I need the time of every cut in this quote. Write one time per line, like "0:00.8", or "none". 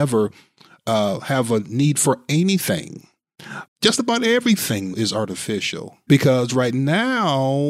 0:03.6
0:04.9
0:06.1